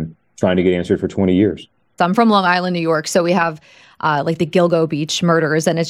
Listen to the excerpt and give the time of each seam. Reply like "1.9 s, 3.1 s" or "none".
2.0 s